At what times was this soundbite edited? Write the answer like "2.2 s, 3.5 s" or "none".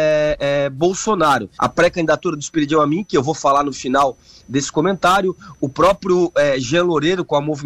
1.6 s